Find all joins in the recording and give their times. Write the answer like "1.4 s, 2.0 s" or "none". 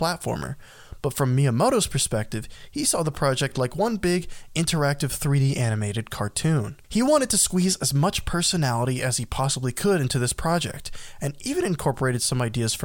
none